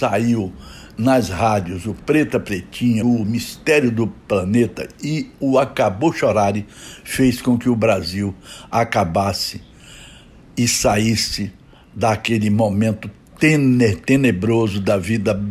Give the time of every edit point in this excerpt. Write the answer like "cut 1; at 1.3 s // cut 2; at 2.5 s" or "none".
cut 1; at 3.0 s